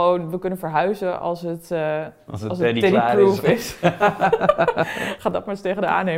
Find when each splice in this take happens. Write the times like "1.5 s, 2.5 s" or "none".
none